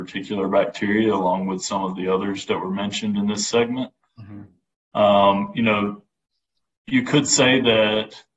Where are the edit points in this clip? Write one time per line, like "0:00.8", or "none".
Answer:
0:04.1